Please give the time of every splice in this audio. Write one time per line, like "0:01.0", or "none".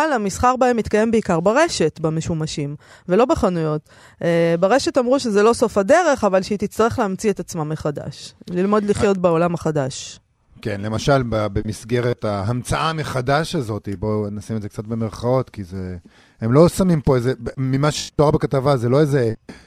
none